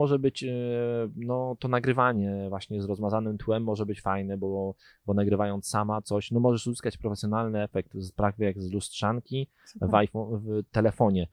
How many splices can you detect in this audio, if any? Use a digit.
0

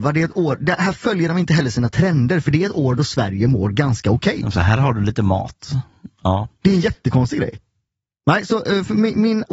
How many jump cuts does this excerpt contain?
0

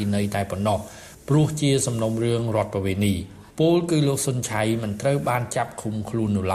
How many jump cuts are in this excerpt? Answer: 1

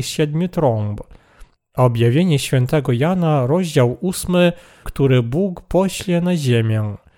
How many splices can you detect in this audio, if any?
2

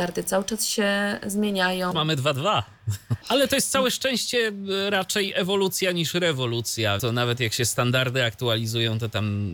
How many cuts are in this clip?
3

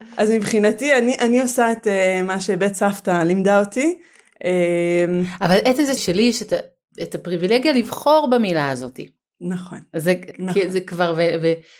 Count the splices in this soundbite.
2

